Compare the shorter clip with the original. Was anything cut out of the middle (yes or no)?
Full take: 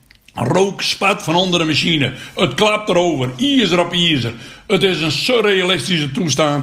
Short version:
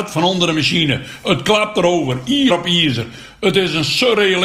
yes